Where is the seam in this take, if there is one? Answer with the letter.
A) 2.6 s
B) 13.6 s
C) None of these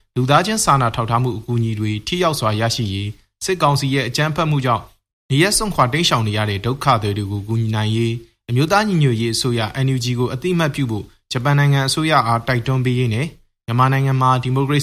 C